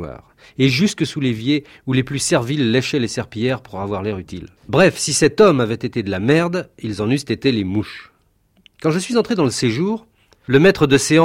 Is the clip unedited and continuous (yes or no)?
no